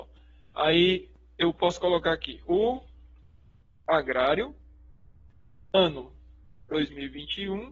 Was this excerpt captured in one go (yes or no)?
yes